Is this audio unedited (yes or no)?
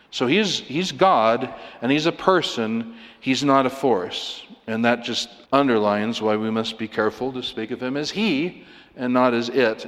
no